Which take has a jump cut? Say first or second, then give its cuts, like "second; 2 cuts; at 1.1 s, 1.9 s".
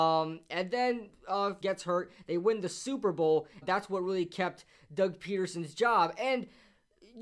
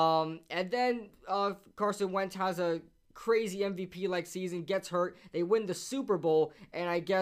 first; 2 cuts; at 1.6 s, 3.6 s